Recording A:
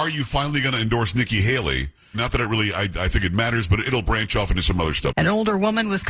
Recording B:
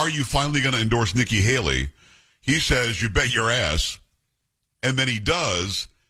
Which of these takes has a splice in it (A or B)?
A